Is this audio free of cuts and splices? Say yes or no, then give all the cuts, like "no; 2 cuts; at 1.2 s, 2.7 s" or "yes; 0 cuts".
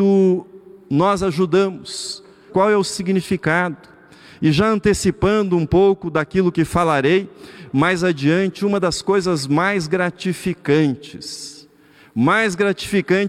no; 1 cut; at 2.5 s